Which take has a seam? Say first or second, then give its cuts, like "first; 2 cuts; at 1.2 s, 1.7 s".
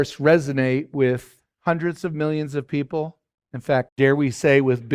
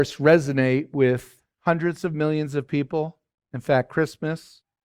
first; 1 cut; at 3.9 s